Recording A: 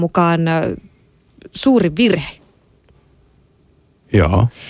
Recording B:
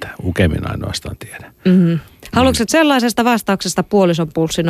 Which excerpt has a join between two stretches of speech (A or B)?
B